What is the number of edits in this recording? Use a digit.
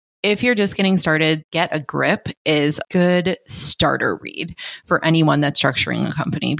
2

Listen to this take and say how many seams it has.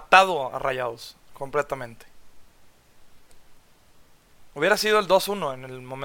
0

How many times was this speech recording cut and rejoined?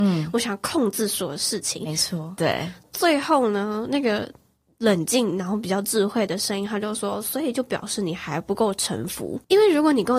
1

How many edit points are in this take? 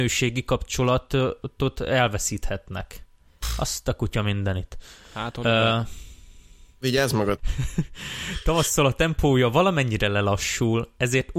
1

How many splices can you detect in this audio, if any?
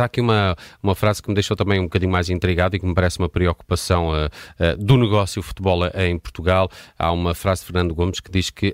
0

